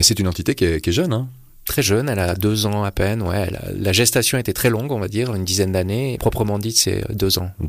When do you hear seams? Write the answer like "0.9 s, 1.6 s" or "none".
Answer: 6.2 s

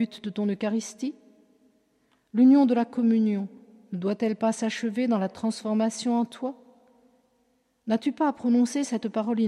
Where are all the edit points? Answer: none

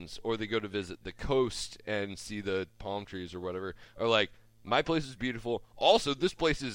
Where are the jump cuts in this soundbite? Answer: none

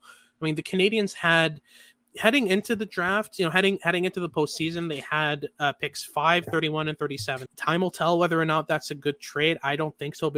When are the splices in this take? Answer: 7.5 s

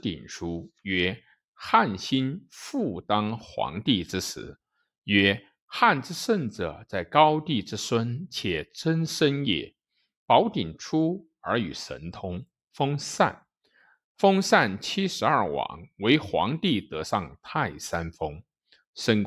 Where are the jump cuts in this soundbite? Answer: none

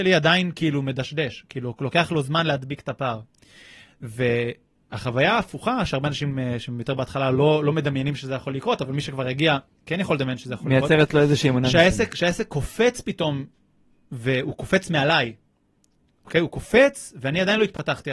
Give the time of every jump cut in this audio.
none

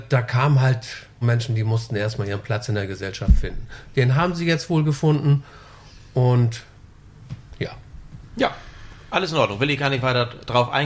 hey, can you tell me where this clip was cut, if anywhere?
1.2 s

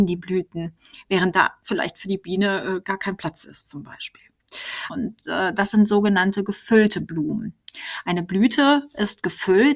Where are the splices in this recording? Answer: 4.9 s

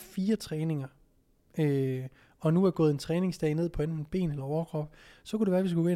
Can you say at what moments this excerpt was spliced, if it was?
none

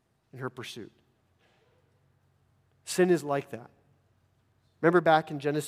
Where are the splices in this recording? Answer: 4.7 s

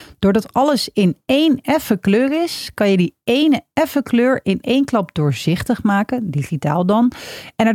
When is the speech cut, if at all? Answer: none

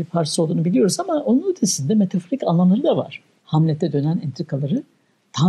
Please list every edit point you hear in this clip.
3.4 s

